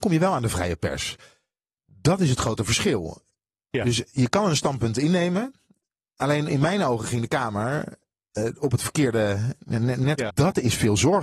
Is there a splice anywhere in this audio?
yes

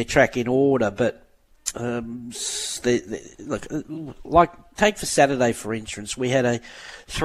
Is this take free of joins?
yes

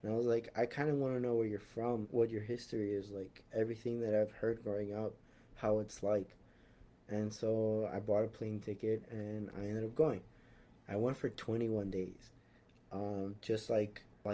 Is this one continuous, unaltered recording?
no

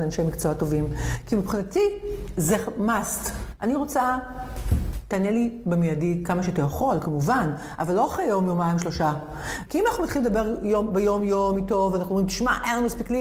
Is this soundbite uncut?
no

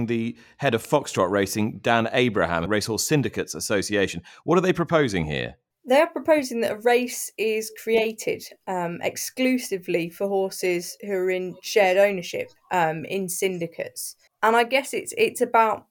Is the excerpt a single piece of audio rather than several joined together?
no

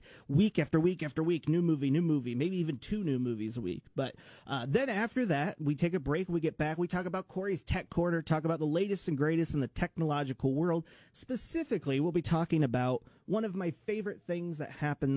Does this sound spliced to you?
no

